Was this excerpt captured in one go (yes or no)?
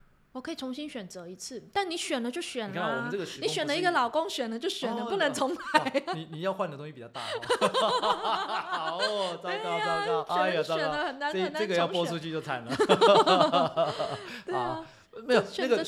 no